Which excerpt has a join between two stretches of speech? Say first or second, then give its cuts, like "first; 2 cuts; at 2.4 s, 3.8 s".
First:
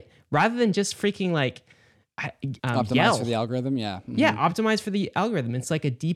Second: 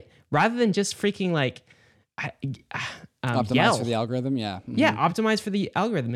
first; 1 cut; at 2.6 s